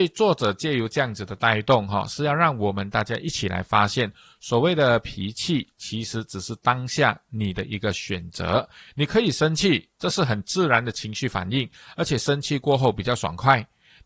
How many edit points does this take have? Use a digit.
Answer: 0